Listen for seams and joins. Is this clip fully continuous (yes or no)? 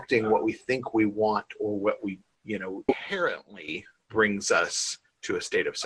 no